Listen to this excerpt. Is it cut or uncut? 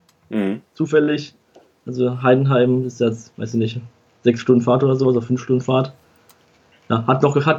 uncut